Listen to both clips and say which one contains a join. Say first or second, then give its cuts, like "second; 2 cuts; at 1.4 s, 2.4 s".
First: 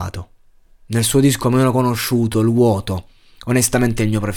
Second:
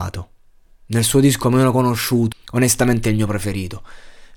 second; 1 cut; at 2.3 s